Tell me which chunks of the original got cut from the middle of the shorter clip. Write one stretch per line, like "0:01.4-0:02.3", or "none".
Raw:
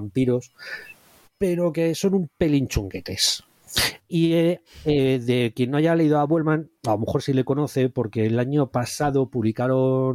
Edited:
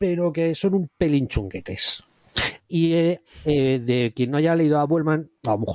none